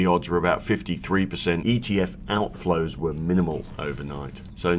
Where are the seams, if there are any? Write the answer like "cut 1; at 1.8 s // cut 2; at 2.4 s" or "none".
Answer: cut 1; at 1.6 s